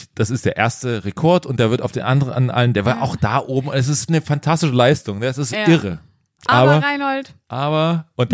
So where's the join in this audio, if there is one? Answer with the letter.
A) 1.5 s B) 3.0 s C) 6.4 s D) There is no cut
C